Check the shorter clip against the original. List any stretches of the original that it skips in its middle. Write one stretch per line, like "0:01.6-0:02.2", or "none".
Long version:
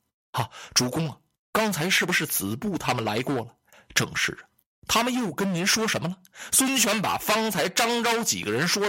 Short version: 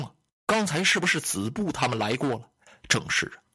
none

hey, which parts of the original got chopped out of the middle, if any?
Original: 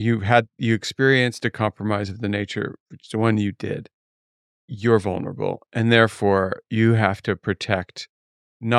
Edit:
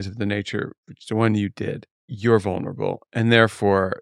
0:04.0-0:04.5

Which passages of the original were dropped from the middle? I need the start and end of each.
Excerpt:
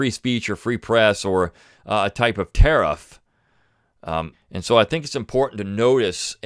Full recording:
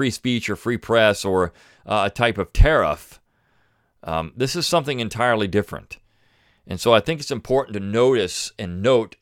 0:04.3-0:06.5

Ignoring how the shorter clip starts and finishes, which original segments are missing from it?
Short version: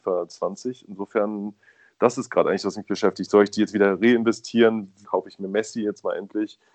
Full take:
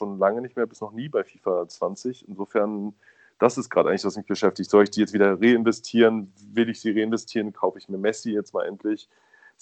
0:06.4-0:07.5

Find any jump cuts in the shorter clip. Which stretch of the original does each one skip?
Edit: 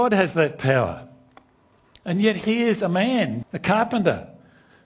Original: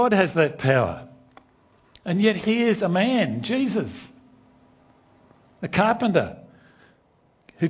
0:03.4-0:05.5

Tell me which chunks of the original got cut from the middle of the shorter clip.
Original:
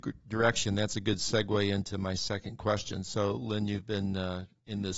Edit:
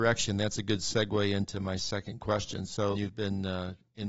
0:03.3-0:03.7

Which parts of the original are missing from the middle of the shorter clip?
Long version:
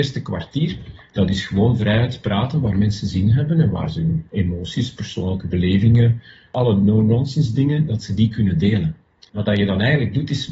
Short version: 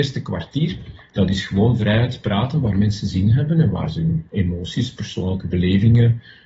none

